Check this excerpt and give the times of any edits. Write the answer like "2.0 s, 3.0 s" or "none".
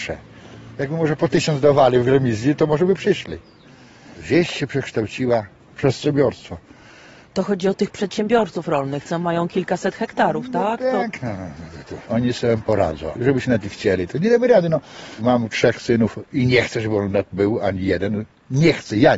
11.9 s, 13.2 s

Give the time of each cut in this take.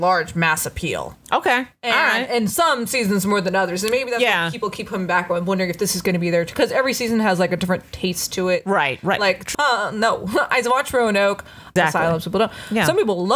9.5 s, 11.8 s

